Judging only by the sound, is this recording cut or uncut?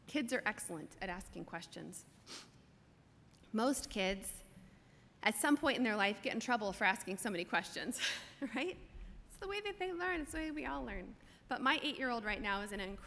uncut